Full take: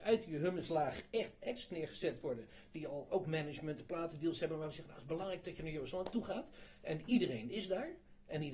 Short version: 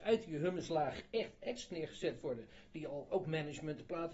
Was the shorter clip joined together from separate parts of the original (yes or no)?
no